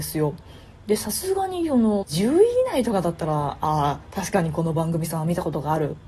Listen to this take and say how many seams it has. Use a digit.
1